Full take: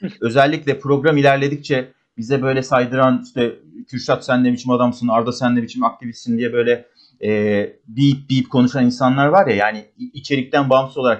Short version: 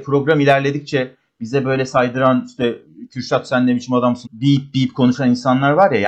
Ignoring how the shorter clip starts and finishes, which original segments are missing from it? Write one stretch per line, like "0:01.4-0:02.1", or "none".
0:05.0-0:07.8